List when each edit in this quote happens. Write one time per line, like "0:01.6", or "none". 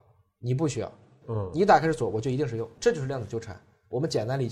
0:01.2
0:02.8